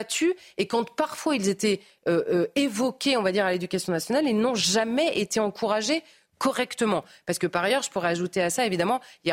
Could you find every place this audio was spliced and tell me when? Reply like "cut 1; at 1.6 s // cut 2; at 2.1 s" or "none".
none